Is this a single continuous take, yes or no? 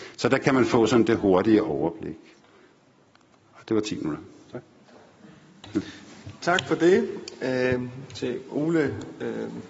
yes